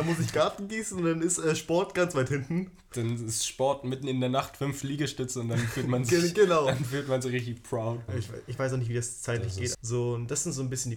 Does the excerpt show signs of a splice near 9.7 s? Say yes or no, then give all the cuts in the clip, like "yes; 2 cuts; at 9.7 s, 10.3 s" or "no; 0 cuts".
yes; 2 cuts; at 8.1 s, 9.7 s